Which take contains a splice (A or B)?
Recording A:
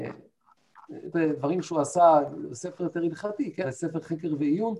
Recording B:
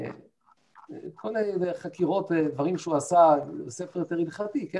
A